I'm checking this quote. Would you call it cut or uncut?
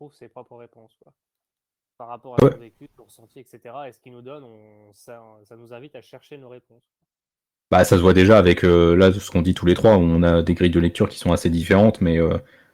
uncut